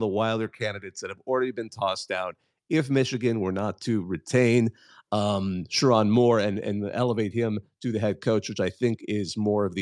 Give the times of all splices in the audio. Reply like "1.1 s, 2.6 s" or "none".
none